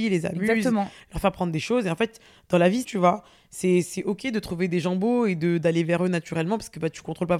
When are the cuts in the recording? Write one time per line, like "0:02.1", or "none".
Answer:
0:02.8